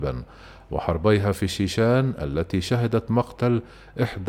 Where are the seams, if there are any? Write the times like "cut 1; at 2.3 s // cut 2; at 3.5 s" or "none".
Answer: none